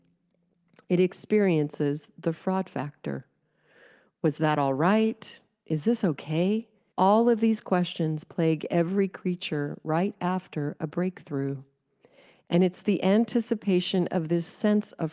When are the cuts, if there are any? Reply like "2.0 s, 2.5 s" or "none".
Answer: 6.9 s